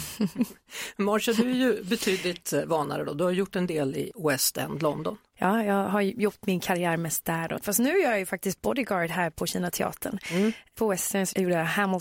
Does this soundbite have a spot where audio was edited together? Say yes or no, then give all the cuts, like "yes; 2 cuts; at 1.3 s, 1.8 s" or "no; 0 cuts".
no; 0 cuts